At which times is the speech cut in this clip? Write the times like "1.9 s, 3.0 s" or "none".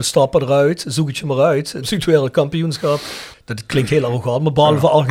1.8 s, 3.3 s